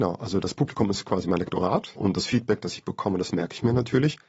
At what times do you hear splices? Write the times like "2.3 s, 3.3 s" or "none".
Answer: none